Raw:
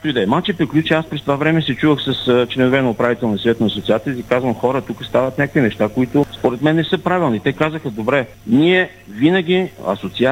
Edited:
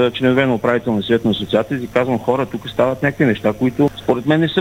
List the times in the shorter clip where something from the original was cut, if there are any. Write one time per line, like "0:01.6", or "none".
none